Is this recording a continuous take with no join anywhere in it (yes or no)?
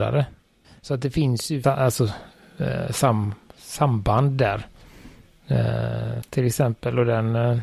no